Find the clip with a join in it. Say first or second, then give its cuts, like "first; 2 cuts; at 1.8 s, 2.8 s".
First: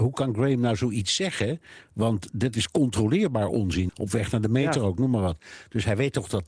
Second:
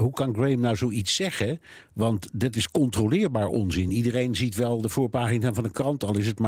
first; 1 cut; at 3.9 s